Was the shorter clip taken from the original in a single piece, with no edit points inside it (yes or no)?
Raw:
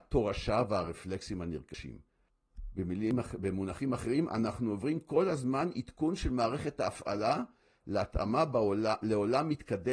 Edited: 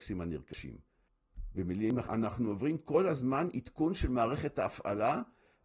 no